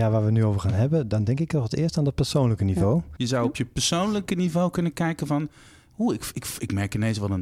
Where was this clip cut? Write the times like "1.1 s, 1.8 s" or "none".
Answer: 3.2 s

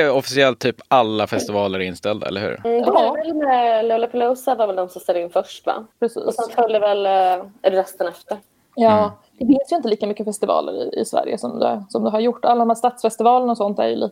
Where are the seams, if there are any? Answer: none

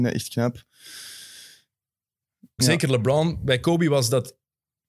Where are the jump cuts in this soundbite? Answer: 2.6 s

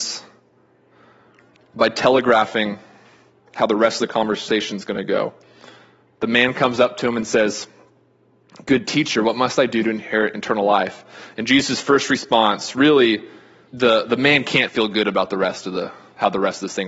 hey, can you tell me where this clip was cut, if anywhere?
13.7 s

